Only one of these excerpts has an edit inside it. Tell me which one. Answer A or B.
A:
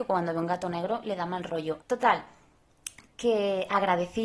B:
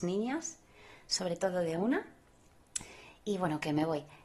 A